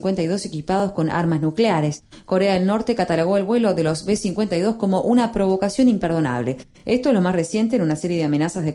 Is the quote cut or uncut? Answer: uncut